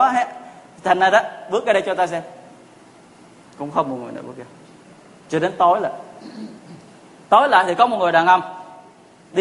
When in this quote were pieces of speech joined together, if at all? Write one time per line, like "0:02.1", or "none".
none